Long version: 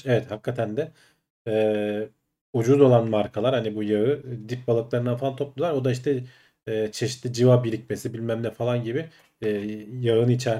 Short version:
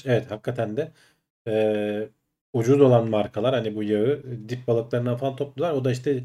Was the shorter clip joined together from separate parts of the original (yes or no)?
no